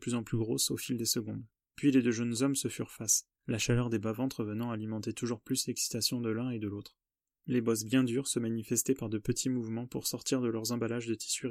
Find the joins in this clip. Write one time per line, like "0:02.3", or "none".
0:03.4